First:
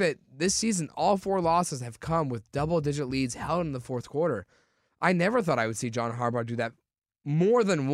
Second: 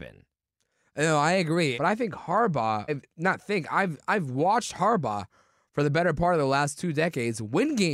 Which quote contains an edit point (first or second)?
second